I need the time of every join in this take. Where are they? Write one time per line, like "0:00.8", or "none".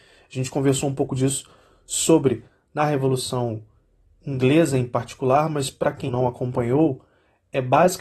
0:06.1